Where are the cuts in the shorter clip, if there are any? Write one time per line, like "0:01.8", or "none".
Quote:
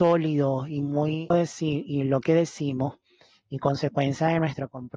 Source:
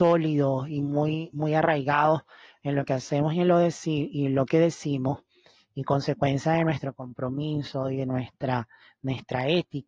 0:01.3

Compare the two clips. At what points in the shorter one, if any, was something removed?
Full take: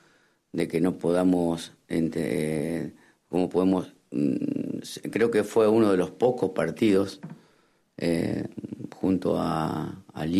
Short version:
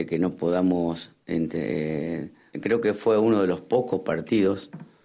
0:02.5

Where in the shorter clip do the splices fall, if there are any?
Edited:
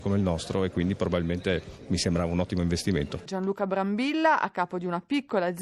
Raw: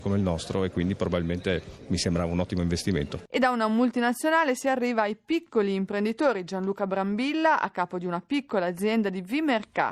0:03.3

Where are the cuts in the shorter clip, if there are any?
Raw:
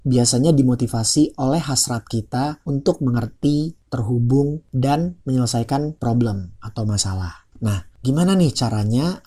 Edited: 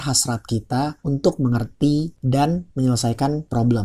0:02.2

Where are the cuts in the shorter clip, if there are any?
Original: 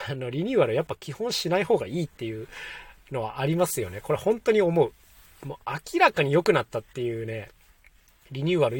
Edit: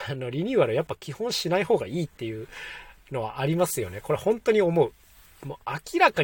none

